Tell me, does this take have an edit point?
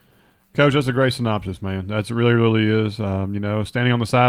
no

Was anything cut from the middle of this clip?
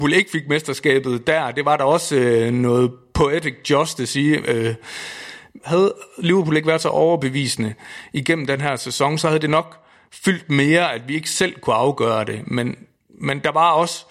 no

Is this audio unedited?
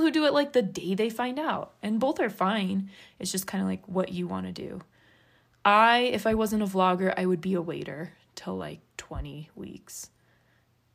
yes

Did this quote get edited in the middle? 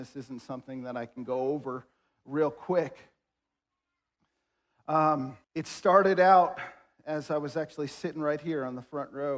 yes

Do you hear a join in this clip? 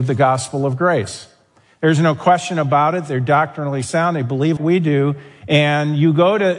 yes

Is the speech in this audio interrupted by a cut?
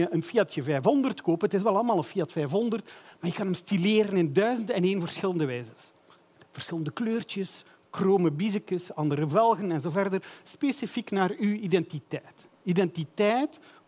no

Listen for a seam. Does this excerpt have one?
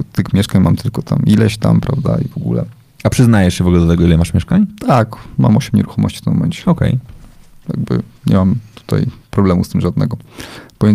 no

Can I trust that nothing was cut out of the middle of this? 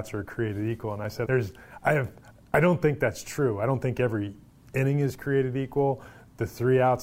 no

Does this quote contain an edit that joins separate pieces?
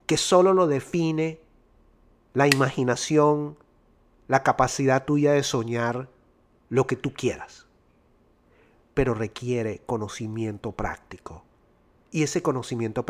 no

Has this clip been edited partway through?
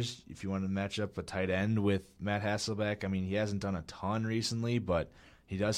no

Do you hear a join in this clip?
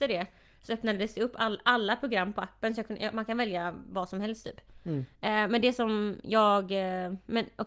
no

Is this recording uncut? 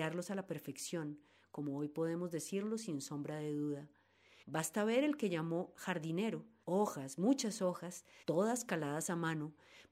no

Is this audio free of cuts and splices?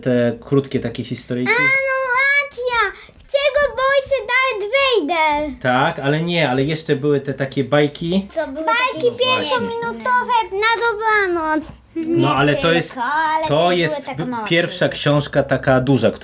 no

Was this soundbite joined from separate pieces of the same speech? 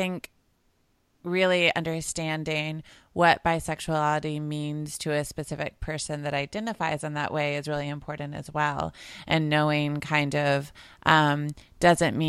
no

